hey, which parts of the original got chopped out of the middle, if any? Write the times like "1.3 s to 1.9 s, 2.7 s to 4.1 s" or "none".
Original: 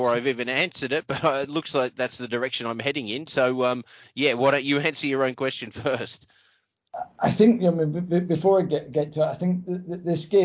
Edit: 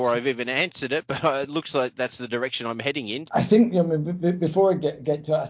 3.3 s to 7.1 s